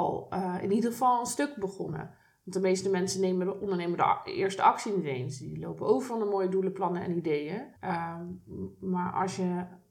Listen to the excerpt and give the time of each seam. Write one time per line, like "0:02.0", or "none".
0:07.8

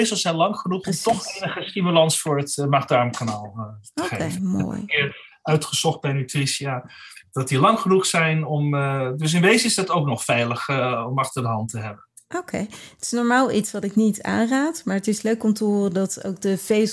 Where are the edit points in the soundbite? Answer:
none

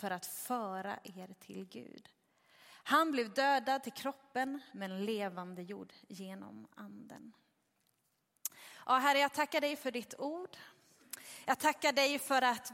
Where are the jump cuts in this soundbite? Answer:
none

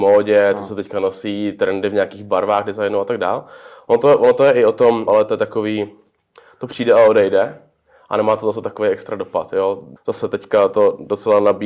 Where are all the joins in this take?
0:05.1
0:10.0

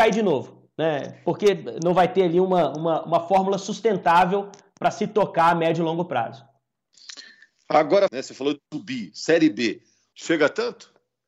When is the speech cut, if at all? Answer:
0:08.1
0:10.1

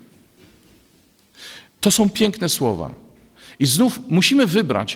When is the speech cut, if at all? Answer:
0:01.7

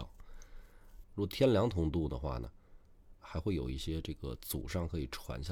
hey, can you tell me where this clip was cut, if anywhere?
0:01.0

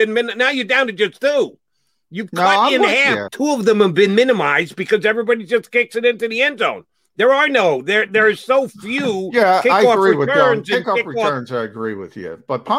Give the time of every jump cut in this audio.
0:03.3

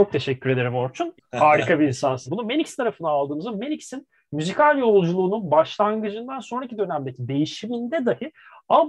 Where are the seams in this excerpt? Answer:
0:01.2
0:02.3

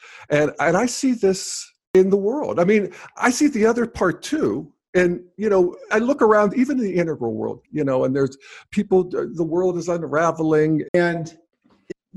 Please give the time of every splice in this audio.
0:07.6
0:10.8

